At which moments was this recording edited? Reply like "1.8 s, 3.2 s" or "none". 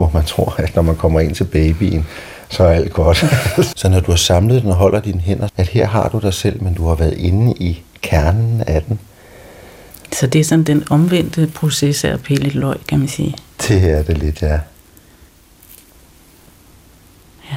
3.7 s, 5.5 s

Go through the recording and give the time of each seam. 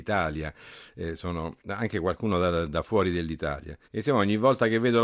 3.8 s

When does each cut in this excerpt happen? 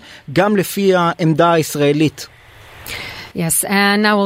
3.3 s

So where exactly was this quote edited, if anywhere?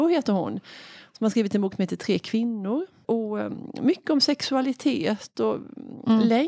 3.0 s

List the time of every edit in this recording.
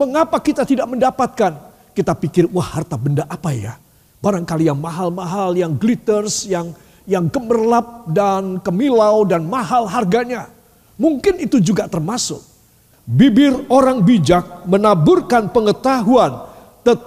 12.9 s

